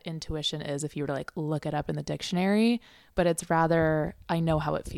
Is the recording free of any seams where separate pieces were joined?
yes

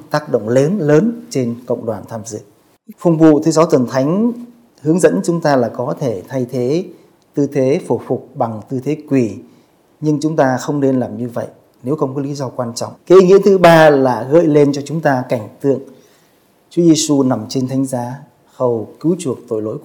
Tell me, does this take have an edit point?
yes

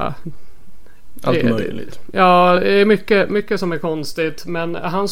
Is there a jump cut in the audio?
no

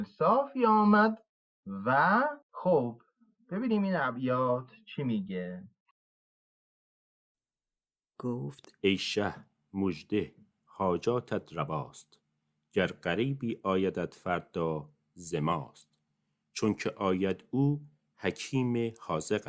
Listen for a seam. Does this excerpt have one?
yes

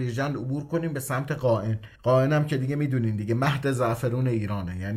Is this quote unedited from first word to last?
no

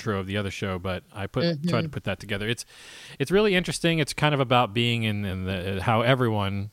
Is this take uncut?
yes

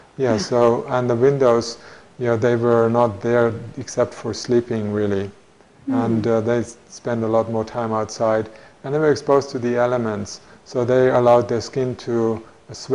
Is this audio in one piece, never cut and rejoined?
yes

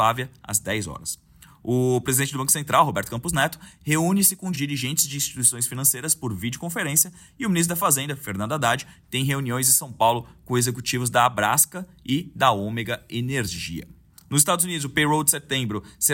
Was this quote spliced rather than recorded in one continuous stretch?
no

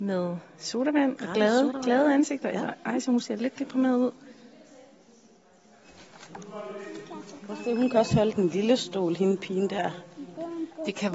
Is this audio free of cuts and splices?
yes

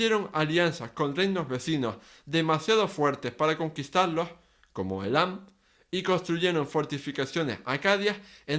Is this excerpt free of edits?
yes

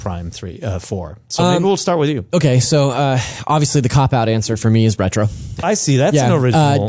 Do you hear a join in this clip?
yes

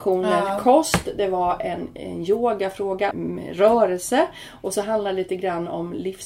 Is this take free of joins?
no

